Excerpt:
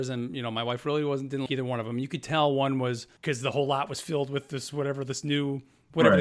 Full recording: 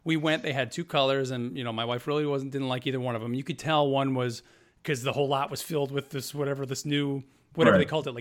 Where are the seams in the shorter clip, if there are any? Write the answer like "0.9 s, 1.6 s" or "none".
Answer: 1.5 s, 3.2 s